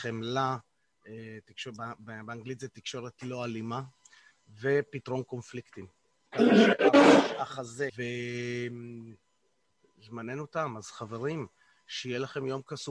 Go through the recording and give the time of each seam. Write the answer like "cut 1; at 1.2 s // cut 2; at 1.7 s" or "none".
cut 1; at 6.3 s // cut 2; at 7.9 s